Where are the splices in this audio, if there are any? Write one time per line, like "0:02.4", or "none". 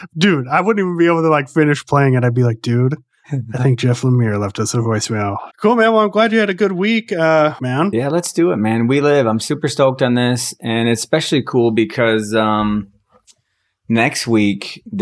0:05.5
0:07.6